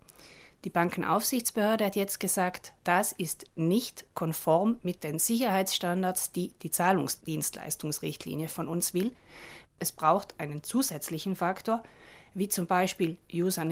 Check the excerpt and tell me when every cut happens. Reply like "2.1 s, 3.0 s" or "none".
2.8 s, 9.6 s